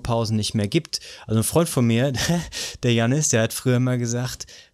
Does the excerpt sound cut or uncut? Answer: uncut